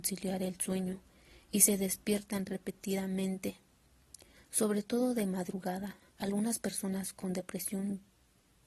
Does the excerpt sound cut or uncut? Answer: uncut